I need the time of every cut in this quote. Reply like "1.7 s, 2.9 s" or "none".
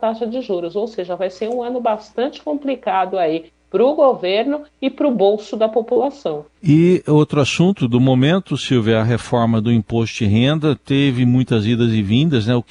6.5 s